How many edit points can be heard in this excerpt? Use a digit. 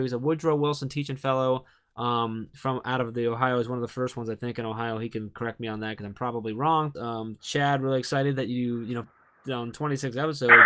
2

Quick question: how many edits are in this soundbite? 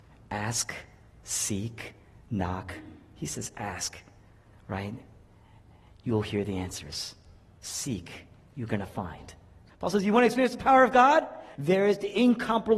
2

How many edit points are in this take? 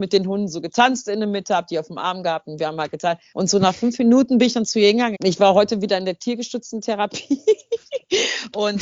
2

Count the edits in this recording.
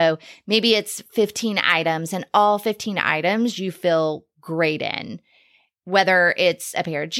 0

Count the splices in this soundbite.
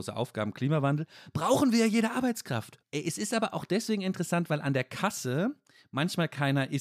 1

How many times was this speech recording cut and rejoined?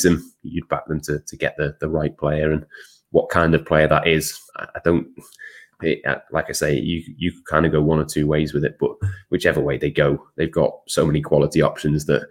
2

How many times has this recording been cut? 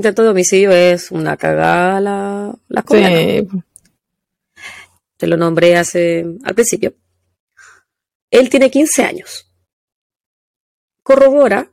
1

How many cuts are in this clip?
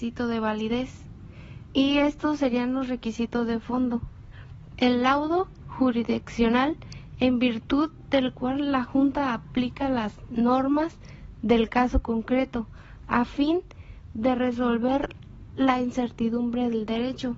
2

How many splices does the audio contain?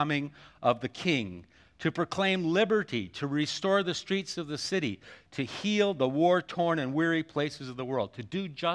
0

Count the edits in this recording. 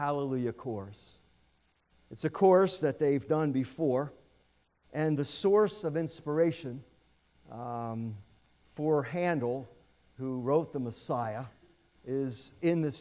0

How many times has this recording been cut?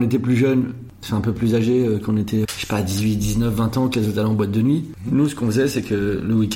1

